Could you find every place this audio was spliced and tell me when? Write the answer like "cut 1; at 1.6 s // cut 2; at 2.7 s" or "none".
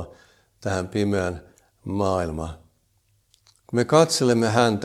none